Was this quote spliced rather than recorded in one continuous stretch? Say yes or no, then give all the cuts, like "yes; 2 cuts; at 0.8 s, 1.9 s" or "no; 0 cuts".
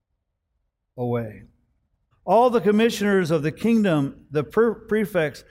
yes; 1 cut; at 2.1 s